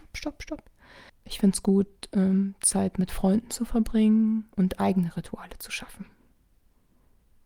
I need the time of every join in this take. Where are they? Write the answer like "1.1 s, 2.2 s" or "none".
1.1 s, 4.5 s